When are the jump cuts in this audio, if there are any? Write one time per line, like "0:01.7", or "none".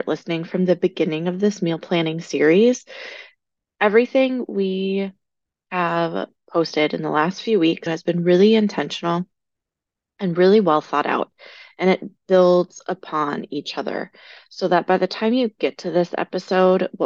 0:07.9